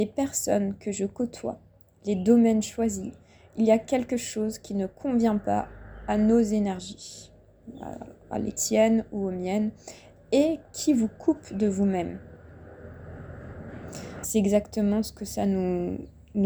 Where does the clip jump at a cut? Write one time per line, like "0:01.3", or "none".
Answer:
0:14.2